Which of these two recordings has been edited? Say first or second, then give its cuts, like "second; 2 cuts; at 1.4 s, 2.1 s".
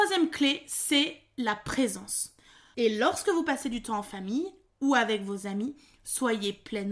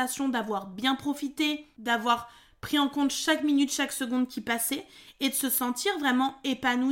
first; 1 cut; at 2.7 s